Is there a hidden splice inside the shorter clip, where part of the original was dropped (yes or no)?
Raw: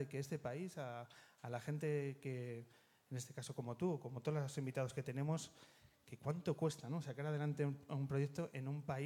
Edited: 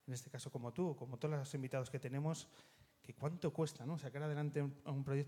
no